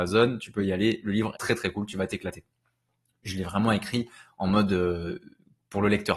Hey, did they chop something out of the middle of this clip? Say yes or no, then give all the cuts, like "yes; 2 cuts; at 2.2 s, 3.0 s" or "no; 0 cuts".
yes; 1 cut; at 1.4 s